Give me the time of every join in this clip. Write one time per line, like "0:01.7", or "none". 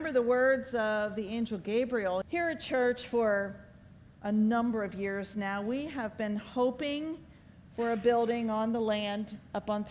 0:02.2

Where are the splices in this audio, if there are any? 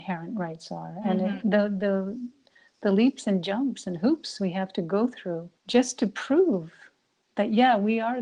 0:01.4
0:05.6

